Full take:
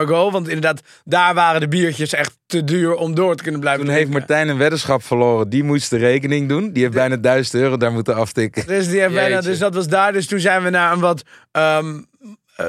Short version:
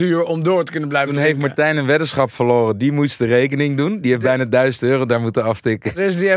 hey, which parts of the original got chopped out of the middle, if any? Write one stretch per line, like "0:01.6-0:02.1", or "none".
none